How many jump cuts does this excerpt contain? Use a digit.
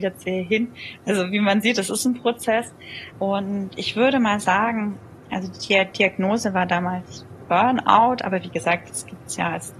1